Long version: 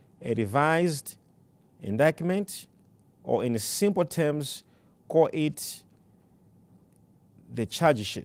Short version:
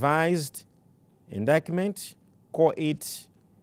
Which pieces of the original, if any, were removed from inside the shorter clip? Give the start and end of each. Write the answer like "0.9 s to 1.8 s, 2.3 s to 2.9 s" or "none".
2.9 s to 5.0 s